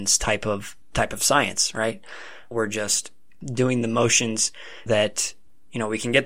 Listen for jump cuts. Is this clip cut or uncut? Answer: cut